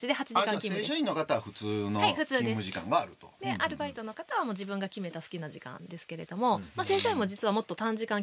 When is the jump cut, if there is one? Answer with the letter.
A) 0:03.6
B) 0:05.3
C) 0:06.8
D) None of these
D